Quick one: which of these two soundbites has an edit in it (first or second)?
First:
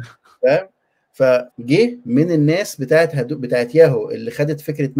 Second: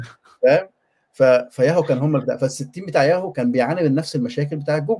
first